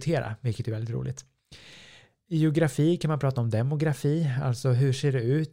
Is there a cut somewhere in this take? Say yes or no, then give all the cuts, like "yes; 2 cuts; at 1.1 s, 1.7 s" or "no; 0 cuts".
no; 0 cuts